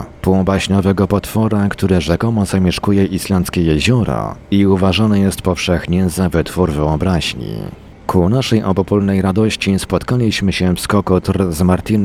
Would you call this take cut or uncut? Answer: cut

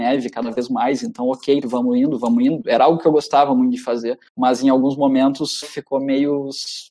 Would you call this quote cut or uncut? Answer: cut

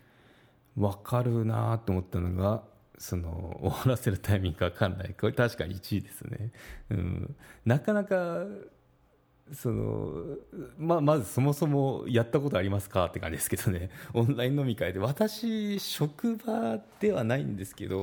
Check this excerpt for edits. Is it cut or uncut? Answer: uncut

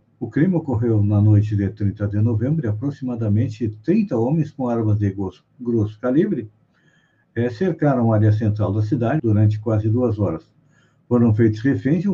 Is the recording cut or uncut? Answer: cut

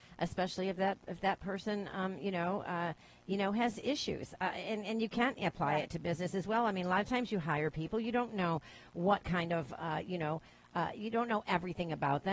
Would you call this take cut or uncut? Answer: uncut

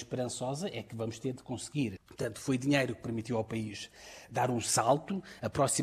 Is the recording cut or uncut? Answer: cut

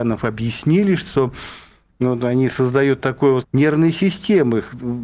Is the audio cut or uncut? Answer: cut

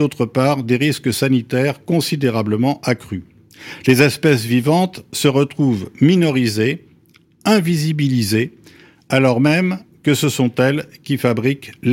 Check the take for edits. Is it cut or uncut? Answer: uncut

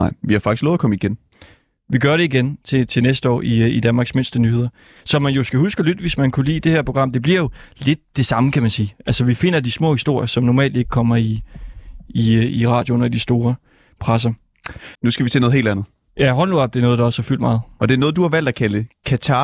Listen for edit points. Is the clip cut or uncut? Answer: cut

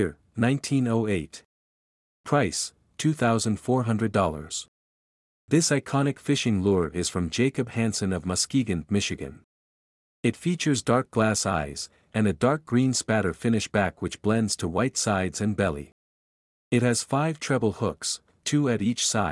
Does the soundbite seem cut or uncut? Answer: uncut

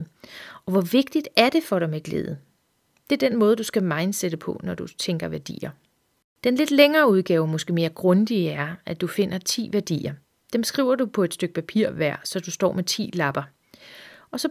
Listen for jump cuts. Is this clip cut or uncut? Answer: uncut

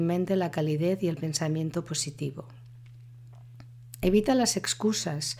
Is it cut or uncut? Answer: uncut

